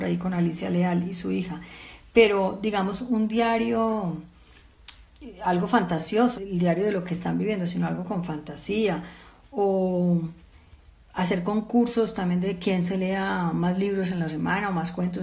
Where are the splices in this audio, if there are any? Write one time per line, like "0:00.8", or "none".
0:06.3